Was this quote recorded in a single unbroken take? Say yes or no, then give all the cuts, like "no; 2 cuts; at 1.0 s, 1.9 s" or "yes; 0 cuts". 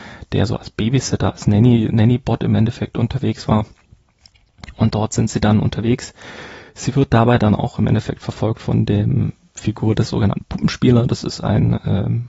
yes; 0 cuts